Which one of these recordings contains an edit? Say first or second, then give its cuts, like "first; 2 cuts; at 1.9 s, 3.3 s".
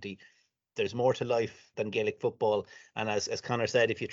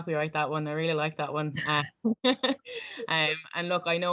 first; 1 cut; at 1.7 s